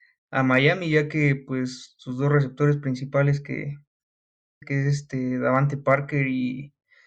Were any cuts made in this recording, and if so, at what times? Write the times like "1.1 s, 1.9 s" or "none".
4.6 s